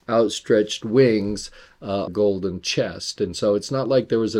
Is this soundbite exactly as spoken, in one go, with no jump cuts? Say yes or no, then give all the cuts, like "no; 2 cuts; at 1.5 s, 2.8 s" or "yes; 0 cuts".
no; 1 cut; at 2.1 s